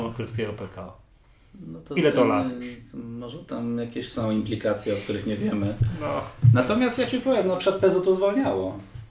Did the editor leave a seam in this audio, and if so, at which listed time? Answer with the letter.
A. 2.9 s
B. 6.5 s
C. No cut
C